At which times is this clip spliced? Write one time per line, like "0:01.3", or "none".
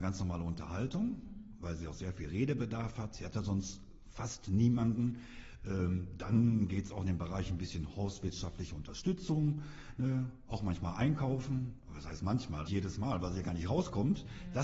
0:05.6
0:12.7